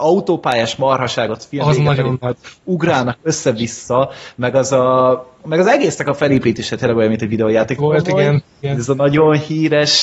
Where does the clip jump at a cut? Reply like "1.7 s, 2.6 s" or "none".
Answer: 7.8 s